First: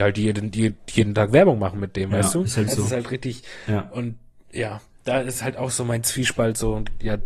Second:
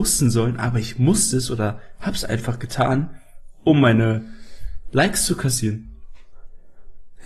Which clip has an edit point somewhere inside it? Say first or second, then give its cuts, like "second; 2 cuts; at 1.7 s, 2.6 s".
first; 1 cut; at 2.7 s